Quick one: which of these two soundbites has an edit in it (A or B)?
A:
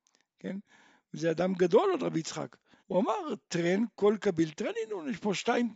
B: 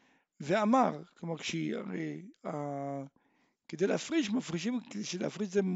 A